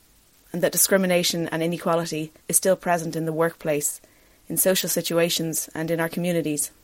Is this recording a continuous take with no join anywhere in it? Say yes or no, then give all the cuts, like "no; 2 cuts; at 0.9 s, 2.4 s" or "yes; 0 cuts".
no; 1 cut; at 2.4 s